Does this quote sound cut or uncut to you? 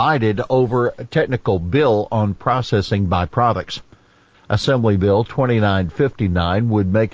cut